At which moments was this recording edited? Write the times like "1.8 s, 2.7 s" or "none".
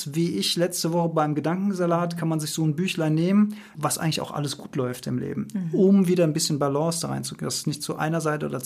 3.8 s